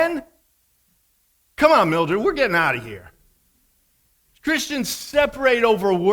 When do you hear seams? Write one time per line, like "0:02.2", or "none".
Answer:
none